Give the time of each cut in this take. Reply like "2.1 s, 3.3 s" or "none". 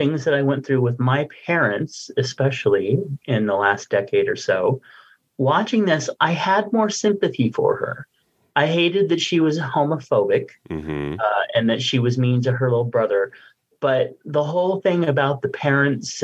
none